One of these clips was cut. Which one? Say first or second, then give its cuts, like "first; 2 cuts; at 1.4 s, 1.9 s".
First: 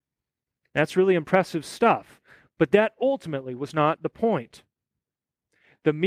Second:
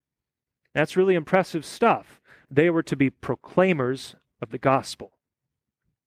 second; 1 cut; at 2.5 s